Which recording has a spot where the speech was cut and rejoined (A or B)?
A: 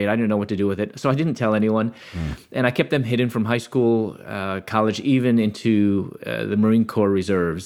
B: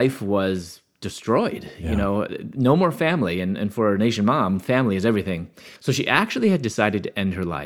B